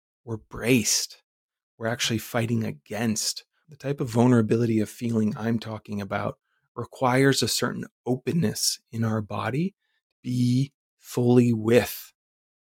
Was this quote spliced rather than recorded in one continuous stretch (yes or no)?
yes